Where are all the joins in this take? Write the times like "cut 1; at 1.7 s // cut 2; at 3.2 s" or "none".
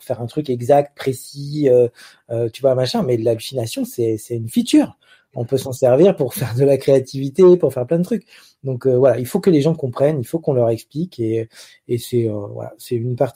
none